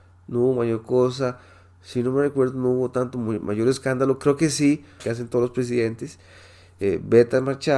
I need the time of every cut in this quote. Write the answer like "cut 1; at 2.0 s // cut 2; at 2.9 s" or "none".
cut 1; at 5.0 s